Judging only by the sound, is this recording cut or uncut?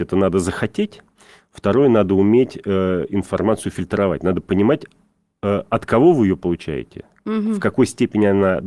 uncut